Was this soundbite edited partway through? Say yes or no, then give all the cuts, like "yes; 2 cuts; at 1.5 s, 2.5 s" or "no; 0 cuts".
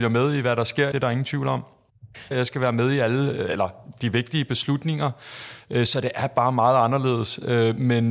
yes; 2 cuts; at 0.9 s, 2.3 s